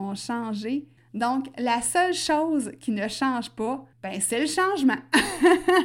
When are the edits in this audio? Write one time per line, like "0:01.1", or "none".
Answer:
0:01.0
0:03.9